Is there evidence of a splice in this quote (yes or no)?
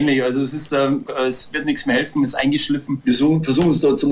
yes